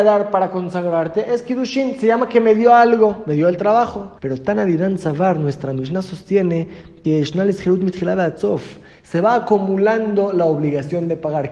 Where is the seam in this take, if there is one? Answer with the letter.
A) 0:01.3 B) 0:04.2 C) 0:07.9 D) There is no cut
B